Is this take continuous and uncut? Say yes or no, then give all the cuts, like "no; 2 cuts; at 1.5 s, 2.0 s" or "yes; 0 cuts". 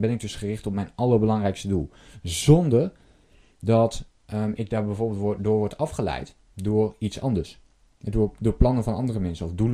yes; 0 cuts